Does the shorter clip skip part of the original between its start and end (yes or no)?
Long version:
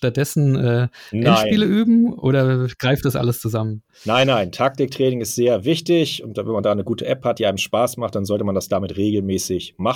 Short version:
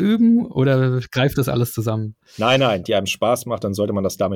yes